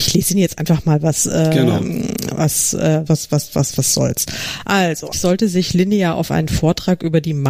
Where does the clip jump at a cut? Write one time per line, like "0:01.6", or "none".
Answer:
0:03.1
0:05.1